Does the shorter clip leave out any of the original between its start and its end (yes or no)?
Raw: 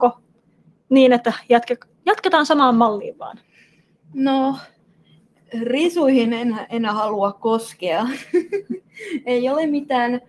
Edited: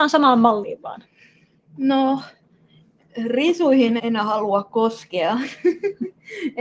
yes